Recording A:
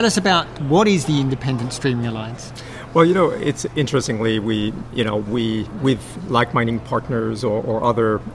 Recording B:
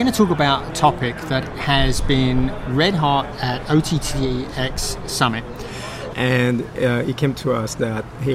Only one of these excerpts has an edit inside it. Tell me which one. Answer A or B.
B